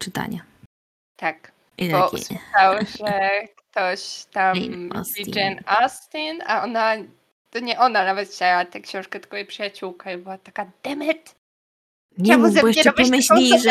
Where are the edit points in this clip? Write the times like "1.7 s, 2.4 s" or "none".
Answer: none